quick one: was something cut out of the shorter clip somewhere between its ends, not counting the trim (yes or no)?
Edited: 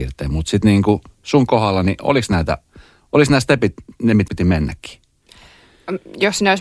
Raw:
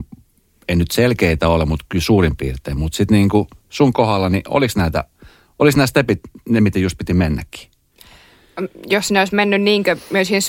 yes